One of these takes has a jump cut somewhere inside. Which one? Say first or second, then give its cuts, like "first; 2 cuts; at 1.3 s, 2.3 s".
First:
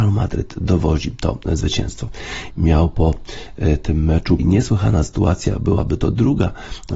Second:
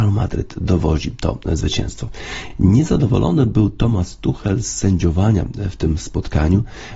first; 2 cuts; at 2.5 s, 4.4 s